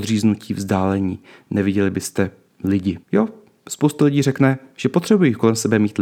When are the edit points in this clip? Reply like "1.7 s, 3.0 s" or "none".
3.0 s

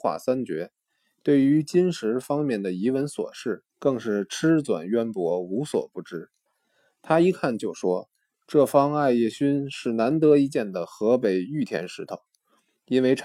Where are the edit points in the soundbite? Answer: 3.7 s

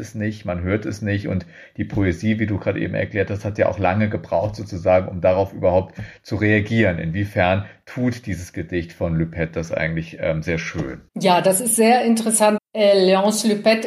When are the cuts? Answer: 11.1 s, 12.6 s

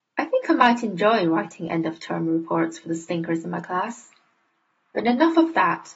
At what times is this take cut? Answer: none

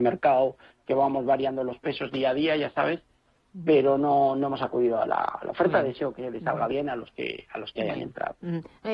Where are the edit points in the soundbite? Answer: none

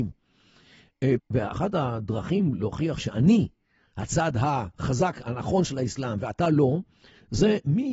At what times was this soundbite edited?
1.2 s

